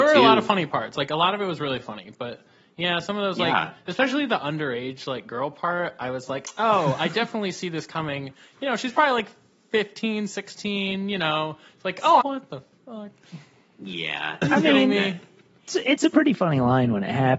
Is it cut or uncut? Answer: cut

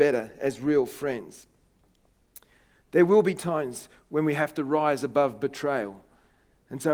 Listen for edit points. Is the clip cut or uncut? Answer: uncut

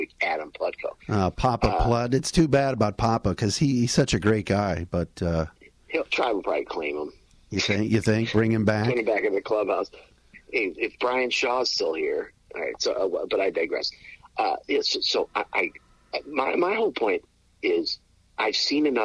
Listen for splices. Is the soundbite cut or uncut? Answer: cut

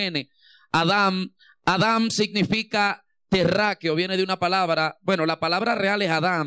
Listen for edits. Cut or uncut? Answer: uncut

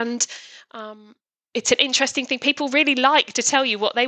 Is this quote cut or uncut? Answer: cut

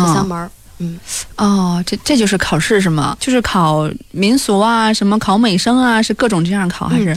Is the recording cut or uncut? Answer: cut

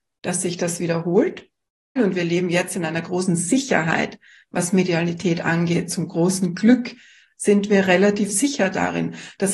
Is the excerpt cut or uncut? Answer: cut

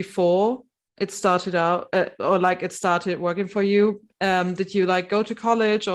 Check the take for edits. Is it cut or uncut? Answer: uncut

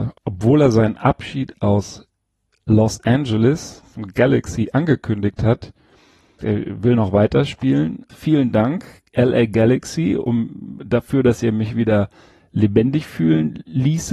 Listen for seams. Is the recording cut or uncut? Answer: cut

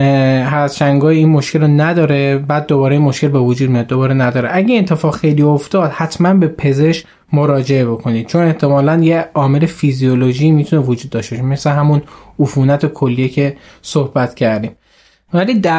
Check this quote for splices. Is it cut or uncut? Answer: uncut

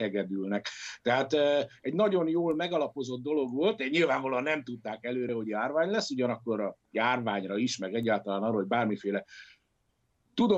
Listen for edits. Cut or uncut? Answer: uncut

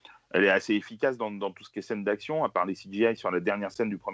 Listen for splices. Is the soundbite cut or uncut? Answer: uncut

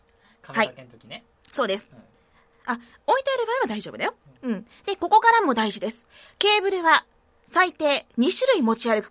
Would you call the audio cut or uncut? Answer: uncut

